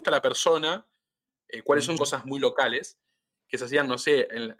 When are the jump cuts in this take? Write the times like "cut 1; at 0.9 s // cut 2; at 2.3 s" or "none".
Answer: cut 1; at 2.0 s